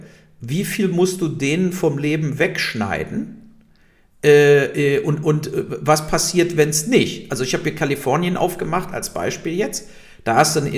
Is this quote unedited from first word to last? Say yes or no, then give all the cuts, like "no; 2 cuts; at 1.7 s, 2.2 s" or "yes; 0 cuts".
yes; 0 cuts